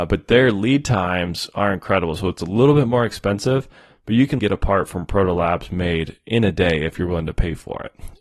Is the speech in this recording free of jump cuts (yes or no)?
no